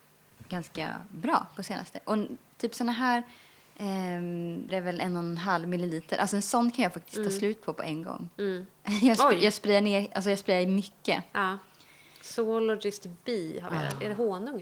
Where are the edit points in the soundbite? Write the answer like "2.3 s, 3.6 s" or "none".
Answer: 4.7 s